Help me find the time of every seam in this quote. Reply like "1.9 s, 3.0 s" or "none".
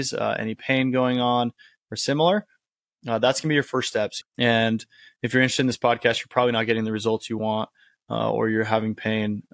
4.2 s